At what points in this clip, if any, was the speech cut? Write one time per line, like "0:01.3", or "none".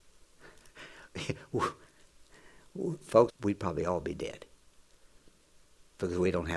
0:03.3